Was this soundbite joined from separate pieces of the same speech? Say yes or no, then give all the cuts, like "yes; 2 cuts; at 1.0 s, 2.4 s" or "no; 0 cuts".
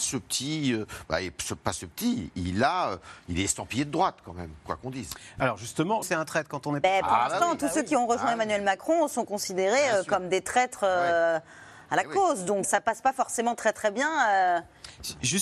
yes; 2 cuts; at 6.0 s, 12.6 s